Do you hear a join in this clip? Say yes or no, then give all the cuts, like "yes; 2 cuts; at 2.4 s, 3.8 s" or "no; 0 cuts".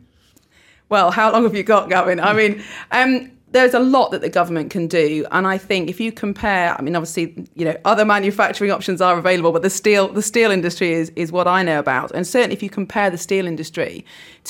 no; 0 cuts